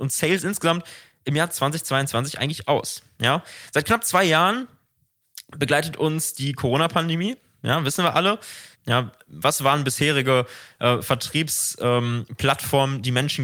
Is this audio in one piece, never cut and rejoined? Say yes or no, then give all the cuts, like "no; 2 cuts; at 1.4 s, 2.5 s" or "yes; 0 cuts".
no; 1 cut; at 8.7 s